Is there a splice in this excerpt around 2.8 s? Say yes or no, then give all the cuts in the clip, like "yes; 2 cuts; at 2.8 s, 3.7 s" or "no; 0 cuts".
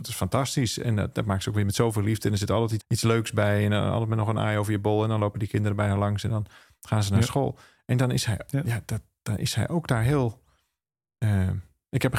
yes; 1 cut; at 2.8 s